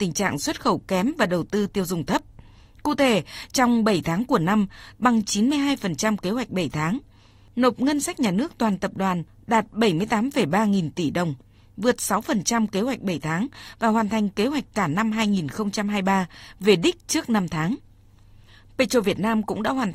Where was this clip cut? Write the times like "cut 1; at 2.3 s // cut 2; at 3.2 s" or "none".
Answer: cut 1; at 4.9 s